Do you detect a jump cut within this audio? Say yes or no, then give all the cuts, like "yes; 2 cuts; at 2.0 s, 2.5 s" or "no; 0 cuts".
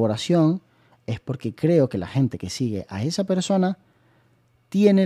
no; 0 cuts